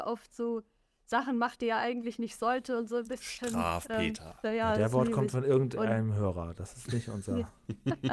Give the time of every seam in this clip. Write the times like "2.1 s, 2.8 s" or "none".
4.4 s